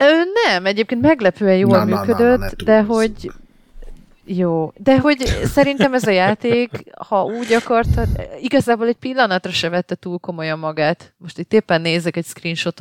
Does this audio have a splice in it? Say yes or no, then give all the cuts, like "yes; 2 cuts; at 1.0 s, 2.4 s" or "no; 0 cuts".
no; 0 cuts